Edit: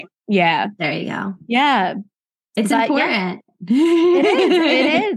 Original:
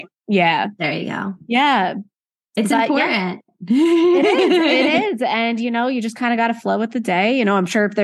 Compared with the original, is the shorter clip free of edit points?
yes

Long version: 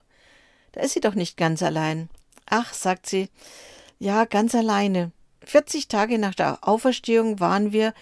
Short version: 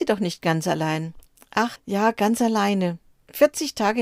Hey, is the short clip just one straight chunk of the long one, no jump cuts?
no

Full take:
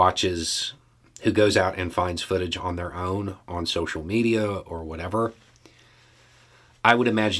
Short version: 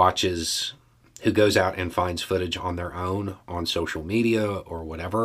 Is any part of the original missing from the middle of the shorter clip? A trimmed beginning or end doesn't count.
no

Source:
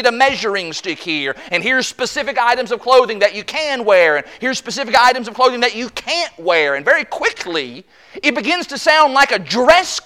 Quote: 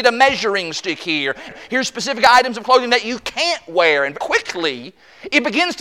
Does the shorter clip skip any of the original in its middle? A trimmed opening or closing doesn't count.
yes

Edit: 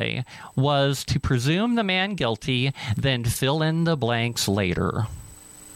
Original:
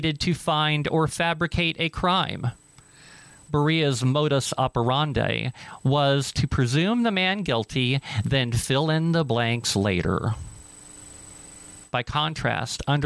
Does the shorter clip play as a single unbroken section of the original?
yes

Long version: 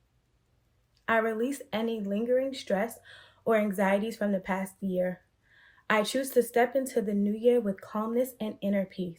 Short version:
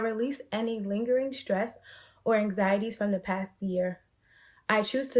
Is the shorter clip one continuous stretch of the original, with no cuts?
yes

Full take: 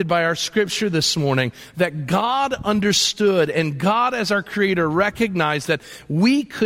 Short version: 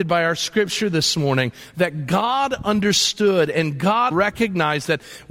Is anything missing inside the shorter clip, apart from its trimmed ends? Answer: yes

